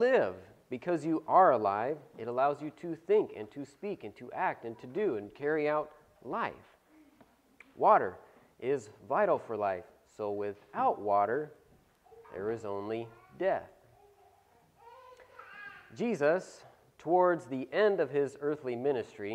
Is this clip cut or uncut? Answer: uncut